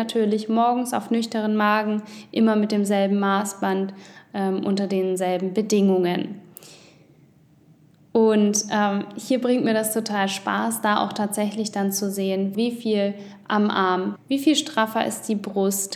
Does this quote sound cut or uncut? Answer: cut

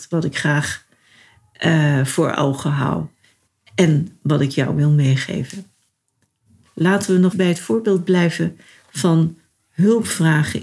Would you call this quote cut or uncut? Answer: cut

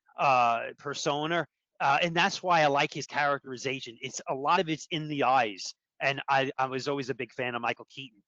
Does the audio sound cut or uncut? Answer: uncut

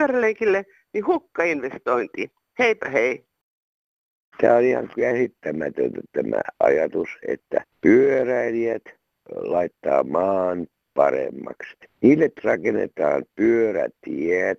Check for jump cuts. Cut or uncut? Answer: cut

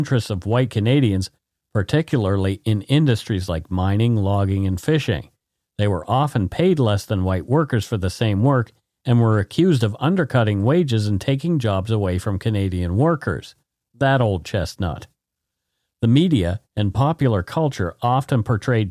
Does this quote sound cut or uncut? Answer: uncut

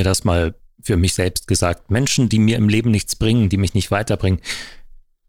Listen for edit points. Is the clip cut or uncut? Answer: uncut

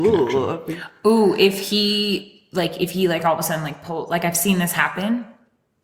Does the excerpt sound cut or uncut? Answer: uncut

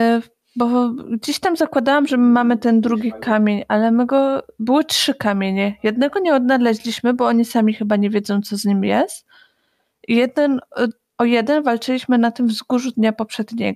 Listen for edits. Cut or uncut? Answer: uncut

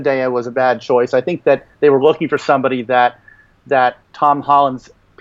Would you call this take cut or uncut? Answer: cut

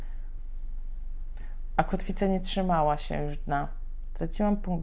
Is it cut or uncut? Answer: cut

